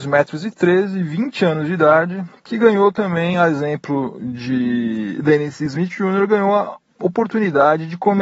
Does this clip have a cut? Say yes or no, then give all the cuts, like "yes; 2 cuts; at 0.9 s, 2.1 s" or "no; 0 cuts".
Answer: no; 0 cuts